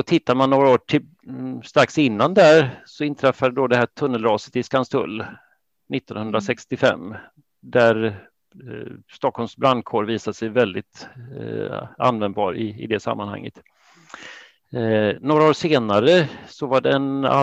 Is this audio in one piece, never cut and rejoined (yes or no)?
yes